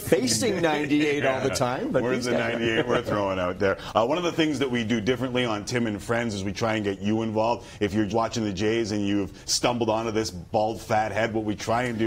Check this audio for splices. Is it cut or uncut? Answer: cut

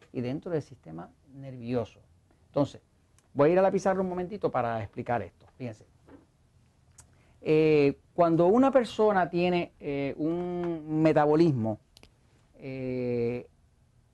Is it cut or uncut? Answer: uncut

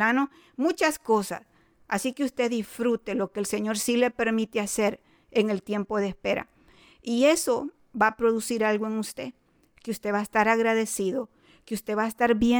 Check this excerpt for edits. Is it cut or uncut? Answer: uncut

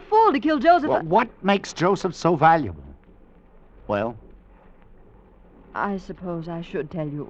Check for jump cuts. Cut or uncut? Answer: uncut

